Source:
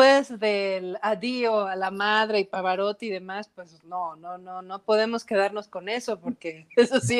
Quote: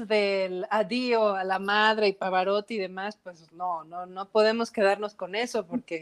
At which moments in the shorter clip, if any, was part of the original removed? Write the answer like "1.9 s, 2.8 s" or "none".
4.1 s

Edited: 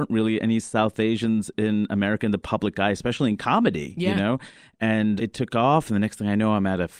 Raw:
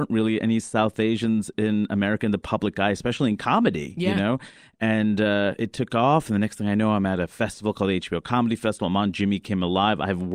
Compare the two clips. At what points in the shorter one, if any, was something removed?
5.2 s

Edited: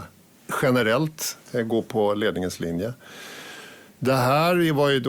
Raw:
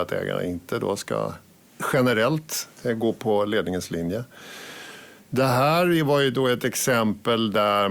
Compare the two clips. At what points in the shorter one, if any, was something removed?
none

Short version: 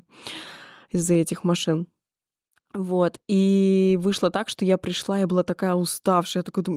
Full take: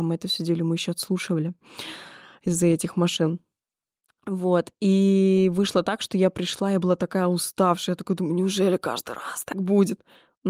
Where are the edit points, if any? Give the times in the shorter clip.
none

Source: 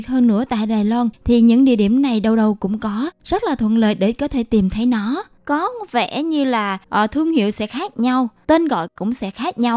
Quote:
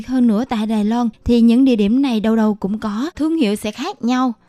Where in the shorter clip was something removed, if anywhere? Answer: 3.1 s

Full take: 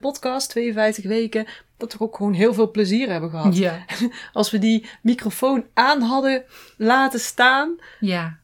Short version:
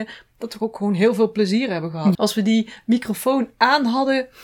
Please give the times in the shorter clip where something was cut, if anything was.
2.1 s

